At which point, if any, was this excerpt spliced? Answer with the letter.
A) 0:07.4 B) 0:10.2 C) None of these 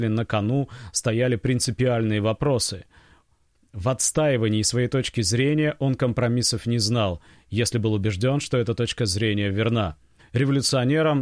B